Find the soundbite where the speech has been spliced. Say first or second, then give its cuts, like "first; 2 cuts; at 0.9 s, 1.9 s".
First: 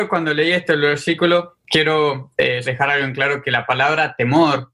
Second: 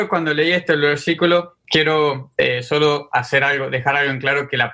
first; 1 cut; at 2.6 s